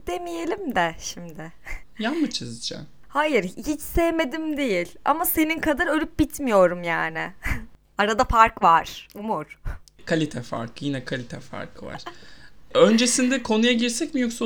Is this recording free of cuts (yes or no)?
yes